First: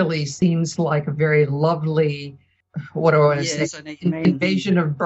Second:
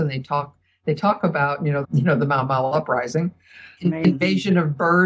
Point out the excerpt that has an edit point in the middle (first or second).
second